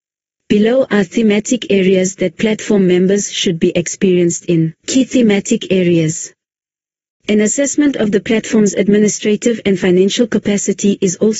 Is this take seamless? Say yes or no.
no